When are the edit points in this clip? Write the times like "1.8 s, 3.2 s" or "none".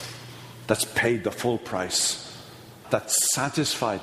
2.8 s

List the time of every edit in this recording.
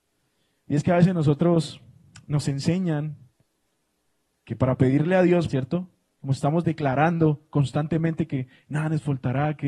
5.5 s

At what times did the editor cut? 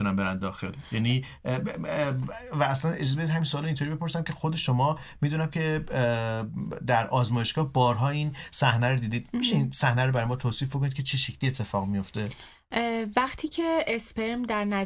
none

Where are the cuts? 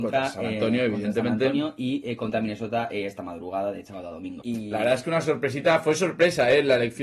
4.4 s

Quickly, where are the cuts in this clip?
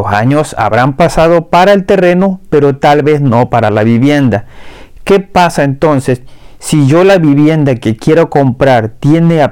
none

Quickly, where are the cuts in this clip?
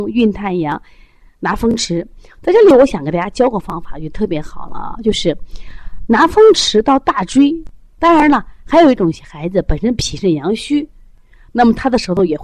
8.0 s

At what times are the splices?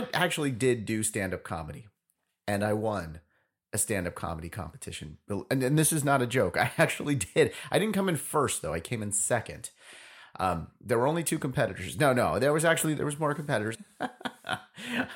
13.7 s

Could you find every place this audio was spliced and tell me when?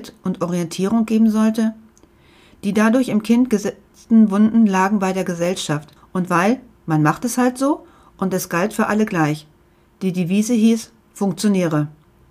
6.0 s

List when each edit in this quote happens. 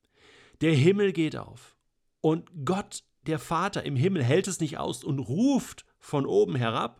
none

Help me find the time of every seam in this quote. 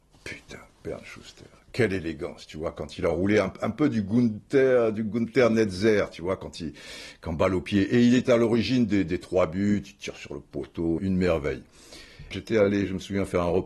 11.0 s, 12.3 s

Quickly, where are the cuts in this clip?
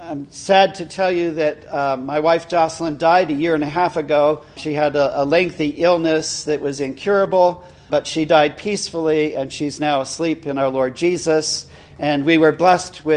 4.6 s, 7.9 s

